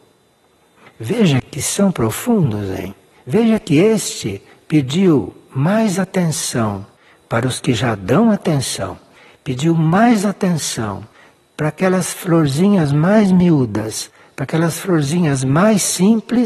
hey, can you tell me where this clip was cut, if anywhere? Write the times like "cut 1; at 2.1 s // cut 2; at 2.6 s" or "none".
none